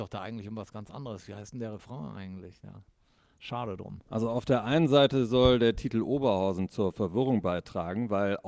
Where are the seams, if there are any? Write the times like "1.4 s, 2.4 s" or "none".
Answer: none